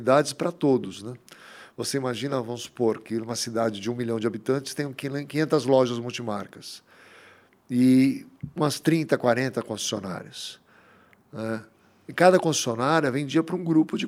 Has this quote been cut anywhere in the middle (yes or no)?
no